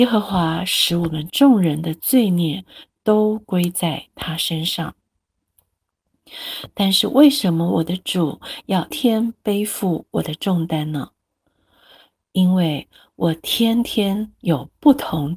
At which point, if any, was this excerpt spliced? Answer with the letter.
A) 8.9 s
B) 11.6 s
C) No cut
A